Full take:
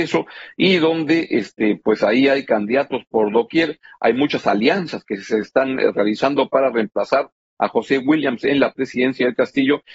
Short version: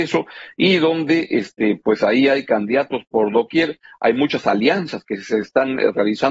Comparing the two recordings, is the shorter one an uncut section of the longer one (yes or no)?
yes